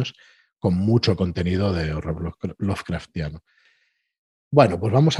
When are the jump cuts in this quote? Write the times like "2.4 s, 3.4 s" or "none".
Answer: none